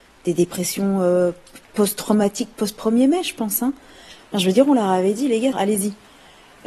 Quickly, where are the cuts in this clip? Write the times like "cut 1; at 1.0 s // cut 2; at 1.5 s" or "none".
cut 1; at 4.2 s // cut 2; at 5.5 s